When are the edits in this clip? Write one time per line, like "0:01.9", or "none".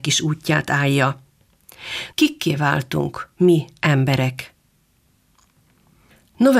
0:02.1